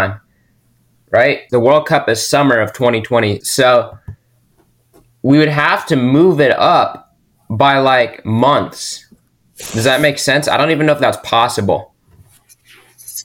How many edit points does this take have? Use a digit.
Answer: 2